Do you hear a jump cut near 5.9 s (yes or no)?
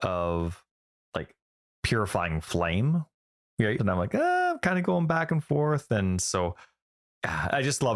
no